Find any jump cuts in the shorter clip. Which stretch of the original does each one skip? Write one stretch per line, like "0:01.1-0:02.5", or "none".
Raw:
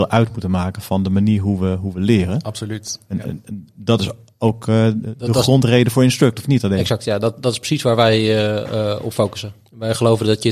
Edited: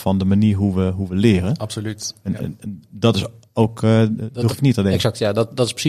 0:05.3-0:06.3